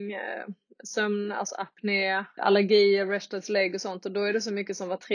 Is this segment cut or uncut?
cut